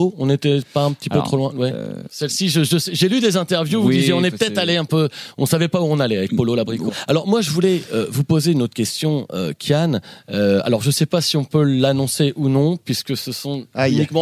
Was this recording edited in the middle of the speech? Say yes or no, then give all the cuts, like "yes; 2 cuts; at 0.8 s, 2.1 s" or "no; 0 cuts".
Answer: yes; 1 cut; at 6.9 s